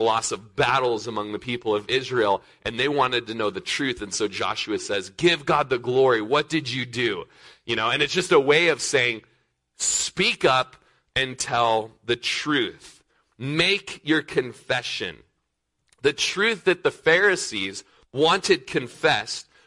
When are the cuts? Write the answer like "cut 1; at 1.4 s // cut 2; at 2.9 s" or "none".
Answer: none